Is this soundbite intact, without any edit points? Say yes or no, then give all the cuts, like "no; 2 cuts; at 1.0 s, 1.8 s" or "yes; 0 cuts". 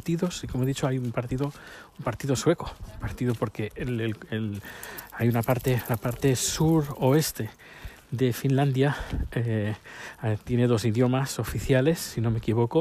yes; 0 cuts